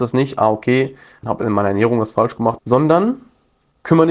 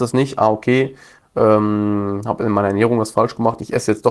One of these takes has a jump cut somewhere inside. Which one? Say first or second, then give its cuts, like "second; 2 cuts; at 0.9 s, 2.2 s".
first; 2 cuts; at 1.2 s, 2.6 s